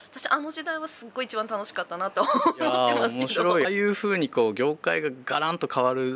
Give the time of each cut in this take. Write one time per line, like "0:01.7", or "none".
0:03.6